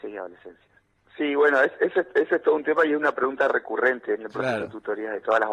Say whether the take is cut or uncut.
cut